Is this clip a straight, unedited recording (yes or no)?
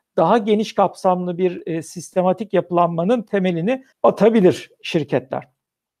no